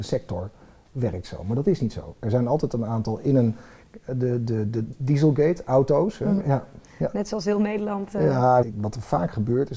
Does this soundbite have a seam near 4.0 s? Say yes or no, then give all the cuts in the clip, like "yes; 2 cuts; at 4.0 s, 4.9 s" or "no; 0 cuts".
no; 2 cuts; at 6.4 s, 8.6 s